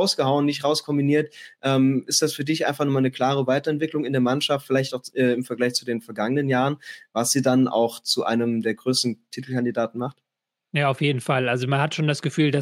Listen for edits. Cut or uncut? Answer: uncut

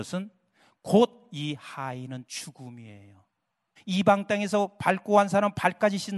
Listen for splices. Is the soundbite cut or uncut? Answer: cut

